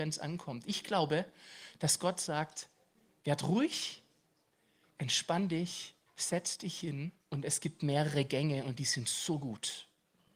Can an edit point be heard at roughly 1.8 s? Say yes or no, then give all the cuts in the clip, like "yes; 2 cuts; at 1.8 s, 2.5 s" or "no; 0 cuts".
no; 2 cuts; at 6.1 s, 7.2 s